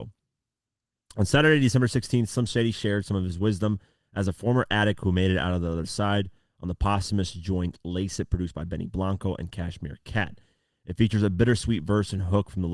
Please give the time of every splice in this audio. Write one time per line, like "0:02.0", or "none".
none